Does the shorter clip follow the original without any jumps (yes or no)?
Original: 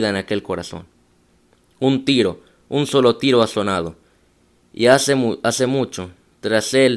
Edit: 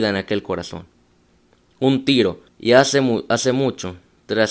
no